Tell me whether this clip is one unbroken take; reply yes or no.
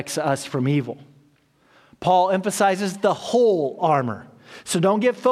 yes